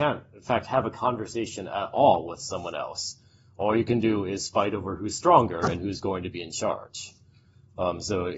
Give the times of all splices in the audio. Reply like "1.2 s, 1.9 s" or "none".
none